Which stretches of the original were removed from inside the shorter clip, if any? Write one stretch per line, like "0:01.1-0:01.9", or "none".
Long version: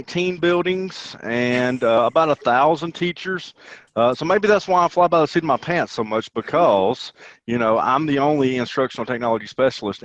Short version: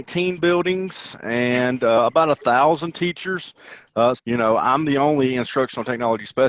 0:04.2-0:07.4